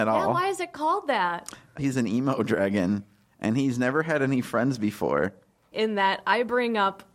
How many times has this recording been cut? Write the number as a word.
two